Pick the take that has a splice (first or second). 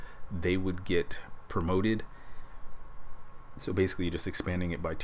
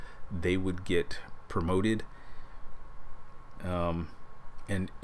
second